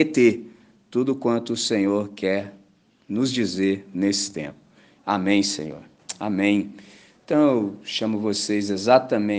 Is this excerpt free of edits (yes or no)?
no